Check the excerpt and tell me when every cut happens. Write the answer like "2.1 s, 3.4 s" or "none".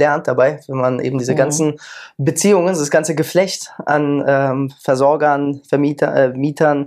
none

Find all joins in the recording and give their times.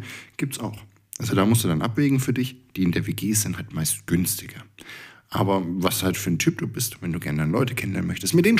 none

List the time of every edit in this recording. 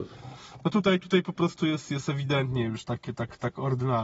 none

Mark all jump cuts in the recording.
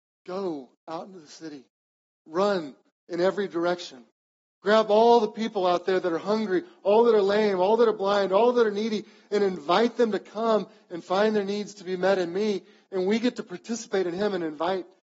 none

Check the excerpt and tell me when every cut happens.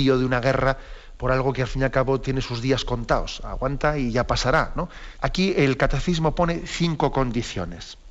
5.2 s

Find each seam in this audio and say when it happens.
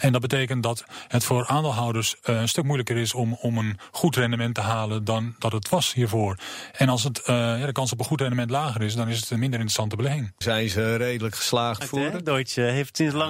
10.4 s, 11.8 s

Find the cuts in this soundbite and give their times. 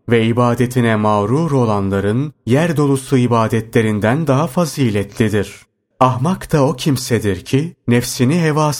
5.9 s

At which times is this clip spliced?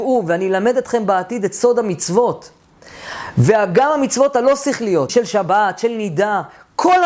5.1 s

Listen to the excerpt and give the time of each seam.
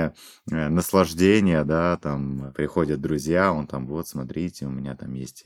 none

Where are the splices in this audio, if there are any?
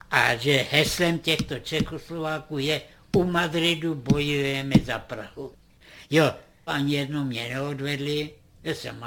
6.7 s

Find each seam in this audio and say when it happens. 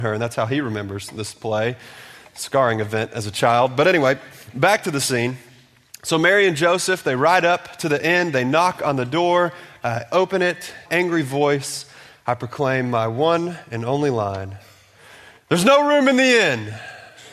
10.9 s

